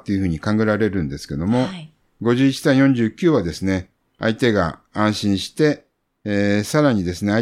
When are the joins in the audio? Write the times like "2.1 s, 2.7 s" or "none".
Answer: none